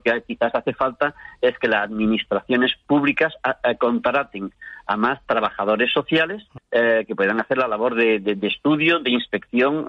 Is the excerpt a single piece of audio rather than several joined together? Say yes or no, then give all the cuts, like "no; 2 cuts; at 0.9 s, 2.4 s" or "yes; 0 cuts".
no; 1 cut; at 6.6 s